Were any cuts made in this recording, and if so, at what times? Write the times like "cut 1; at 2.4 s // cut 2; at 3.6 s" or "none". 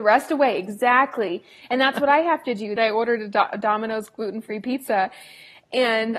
cut 1; at 2.8 s